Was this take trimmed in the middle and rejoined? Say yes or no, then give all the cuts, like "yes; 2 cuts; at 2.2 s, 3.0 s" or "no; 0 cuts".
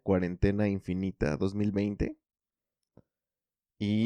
no; 0 cuts